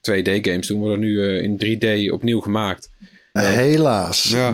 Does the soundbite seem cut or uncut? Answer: cut